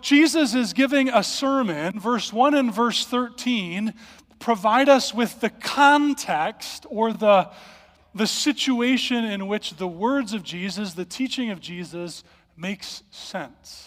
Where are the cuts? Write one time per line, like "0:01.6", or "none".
none